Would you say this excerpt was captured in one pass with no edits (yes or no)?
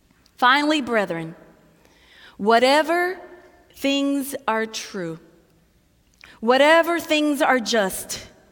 no